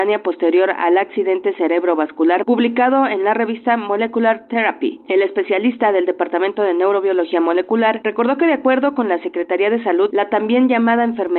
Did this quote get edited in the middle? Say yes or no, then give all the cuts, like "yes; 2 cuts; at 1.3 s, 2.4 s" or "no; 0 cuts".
no; 0 cuts